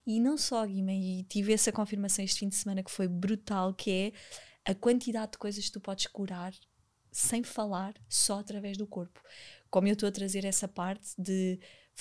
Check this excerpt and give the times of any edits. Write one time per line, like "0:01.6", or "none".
none